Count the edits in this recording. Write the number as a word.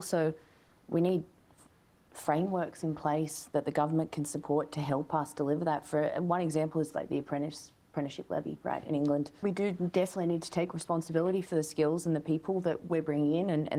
one